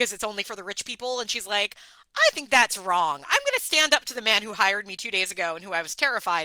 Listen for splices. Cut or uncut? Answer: uncut